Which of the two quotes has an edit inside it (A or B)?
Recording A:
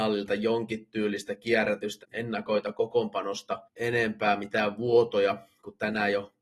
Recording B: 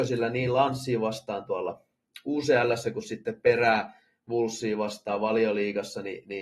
A